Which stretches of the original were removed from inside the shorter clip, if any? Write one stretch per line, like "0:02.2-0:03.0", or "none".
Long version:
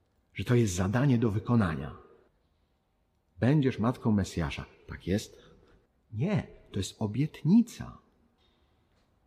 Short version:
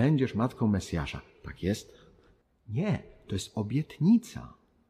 none